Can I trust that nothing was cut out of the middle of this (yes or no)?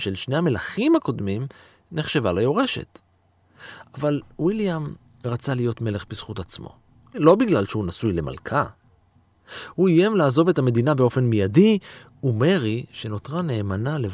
yes